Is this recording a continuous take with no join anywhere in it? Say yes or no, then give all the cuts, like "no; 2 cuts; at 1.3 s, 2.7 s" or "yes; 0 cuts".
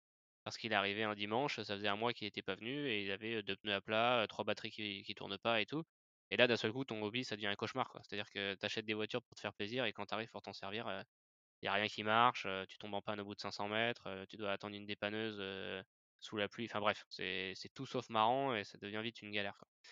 yes; 0 cuts